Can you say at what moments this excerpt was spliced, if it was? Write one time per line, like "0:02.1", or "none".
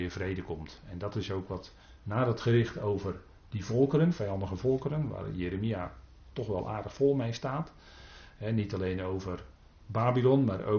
none